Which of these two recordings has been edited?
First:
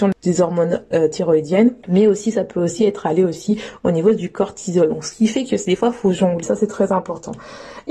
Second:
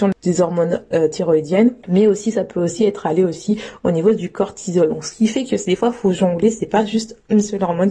first; 1 cut; at 6.4 s

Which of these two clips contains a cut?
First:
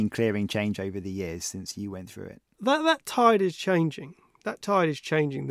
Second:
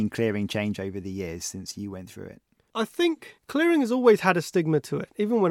first; 1 cut; at 2.5 s

